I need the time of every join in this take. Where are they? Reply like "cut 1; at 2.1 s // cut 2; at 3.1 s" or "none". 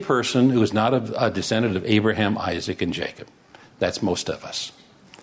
none